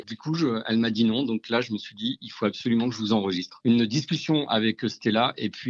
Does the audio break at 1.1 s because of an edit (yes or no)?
no